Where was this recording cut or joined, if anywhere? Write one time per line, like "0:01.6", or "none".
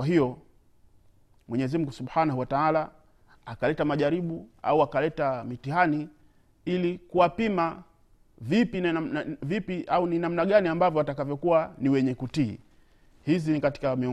none